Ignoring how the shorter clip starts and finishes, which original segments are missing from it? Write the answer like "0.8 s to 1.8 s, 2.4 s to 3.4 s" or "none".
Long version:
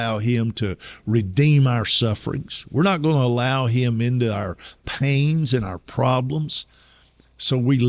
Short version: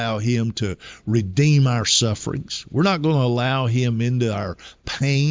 none